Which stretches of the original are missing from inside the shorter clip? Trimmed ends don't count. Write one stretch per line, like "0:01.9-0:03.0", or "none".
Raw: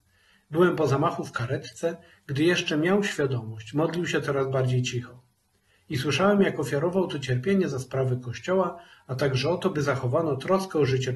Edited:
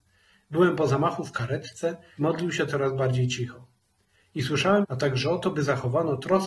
0:02.2-0:03.7
0:06.4-0:09.0